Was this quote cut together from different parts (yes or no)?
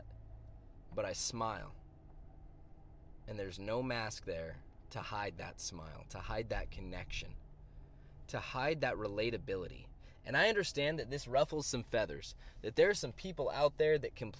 no